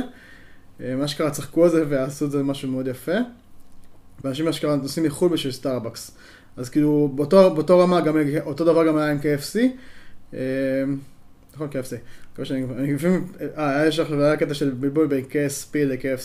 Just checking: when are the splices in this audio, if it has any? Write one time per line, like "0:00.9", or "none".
0:04.2